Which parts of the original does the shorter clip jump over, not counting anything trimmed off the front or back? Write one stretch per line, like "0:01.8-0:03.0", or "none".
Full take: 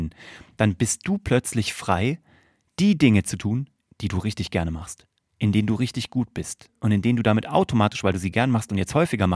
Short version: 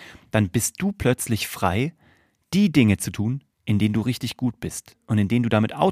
0:03.8-0:05.3